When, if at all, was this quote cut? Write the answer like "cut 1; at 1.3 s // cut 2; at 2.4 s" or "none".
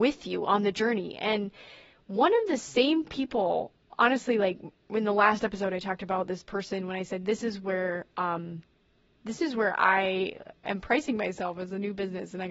none